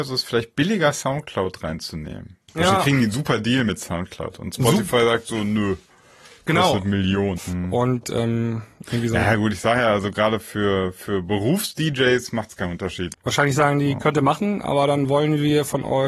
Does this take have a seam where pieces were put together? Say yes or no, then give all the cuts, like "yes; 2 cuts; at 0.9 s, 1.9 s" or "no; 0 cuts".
yes; 2 cuts; at 7.4 s, 13.1 s